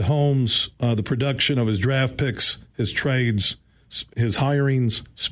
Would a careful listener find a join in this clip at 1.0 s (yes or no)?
no